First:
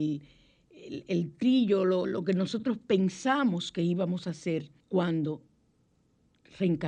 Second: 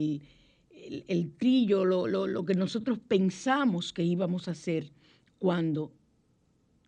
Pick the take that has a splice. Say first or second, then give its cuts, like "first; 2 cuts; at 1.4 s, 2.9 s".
first; 2 cuts; at 2.0 s, 4.8 s